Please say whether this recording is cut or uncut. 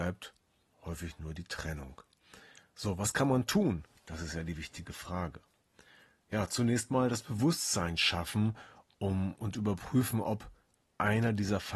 uncut